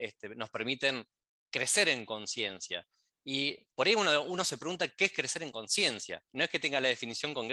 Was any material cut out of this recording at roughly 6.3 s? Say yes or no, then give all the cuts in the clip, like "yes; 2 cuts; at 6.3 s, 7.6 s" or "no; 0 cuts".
no; 1 cut; at 3.7 s